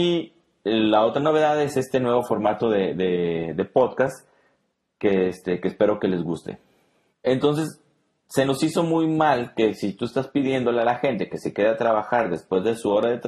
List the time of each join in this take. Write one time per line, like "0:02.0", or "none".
0:07.1